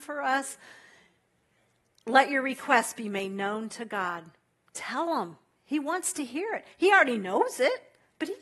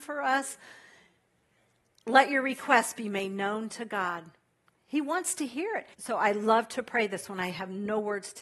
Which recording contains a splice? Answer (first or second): second